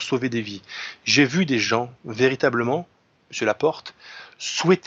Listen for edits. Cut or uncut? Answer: uncut